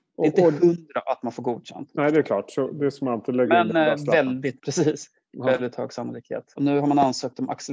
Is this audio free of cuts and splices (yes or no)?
no